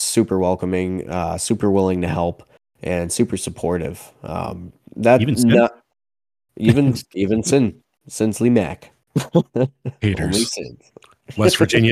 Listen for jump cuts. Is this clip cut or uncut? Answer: uncut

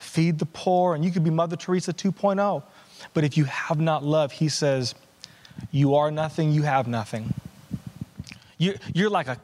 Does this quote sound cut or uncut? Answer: uncut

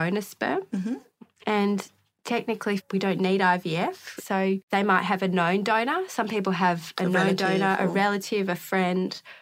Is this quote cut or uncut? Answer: cut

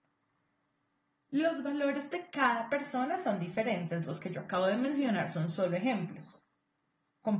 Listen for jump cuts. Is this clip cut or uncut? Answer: uncut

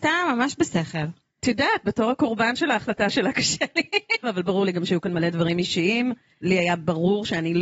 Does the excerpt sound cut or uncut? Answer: cut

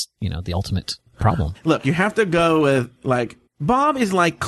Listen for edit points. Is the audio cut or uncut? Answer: cut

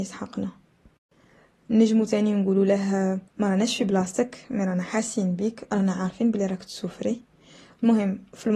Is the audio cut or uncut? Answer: cut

